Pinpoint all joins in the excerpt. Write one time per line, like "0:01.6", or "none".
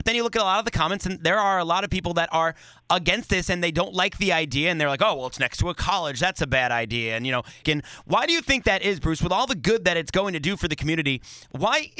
0:07.6